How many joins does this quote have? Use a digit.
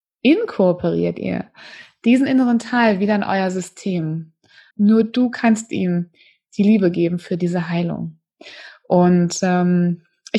1